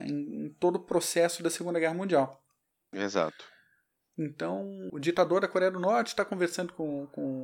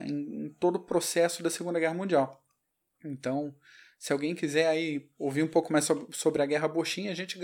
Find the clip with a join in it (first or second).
first